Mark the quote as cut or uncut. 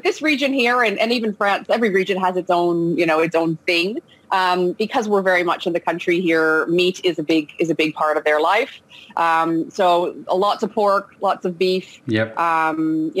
uncut